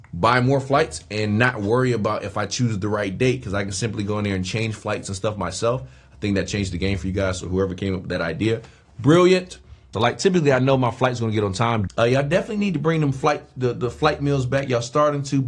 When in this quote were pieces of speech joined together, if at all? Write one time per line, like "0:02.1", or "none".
0:09.9
0:11.9